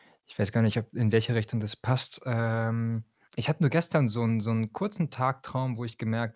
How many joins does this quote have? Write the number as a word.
zero